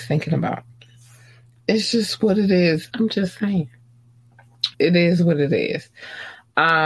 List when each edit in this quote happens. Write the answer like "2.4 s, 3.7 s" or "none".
2.9 s, 4.7 s